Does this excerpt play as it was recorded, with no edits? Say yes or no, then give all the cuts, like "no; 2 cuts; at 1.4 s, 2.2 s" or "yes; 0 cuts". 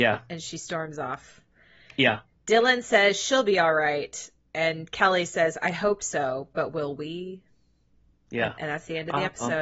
yes; 0 cuts